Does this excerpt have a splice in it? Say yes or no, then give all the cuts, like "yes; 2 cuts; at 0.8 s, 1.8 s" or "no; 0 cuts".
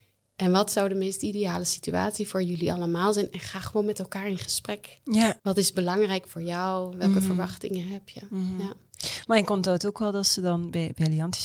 yes; 1 cut; at 5.4 s